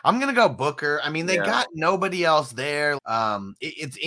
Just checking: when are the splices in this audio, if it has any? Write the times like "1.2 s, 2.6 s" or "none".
3.0 s